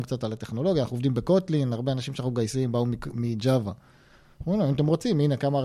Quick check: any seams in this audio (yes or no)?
no